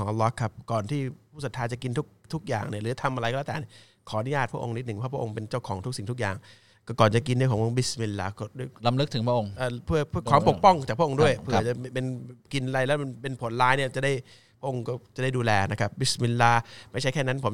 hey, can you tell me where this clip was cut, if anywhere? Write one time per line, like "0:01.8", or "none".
none